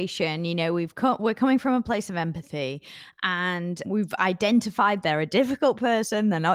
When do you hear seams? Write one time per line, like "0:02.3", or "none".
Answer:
0:03.8

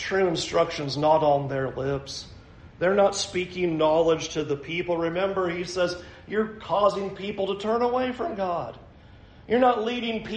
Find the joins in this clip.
none

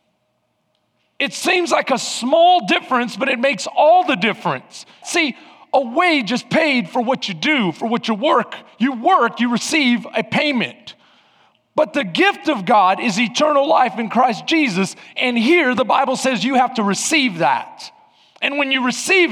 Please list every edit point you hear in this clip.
0:05.0

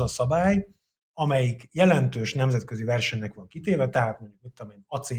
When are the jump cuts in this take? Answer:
0:01.0

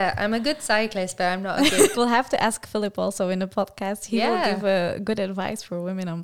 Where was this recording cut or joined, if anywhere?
0:01.9

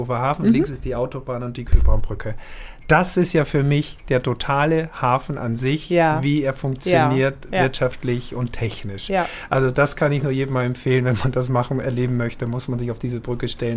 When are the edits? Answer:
none

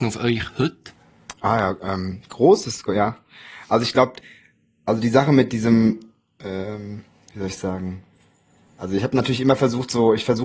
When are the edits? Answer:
none

